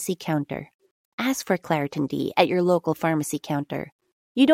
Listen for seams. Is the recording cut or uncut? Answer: uncut